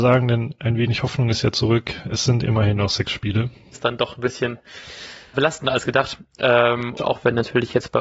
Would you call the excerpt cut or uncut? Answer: cut